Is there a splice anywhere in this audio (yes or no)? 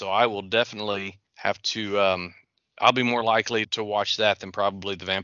yes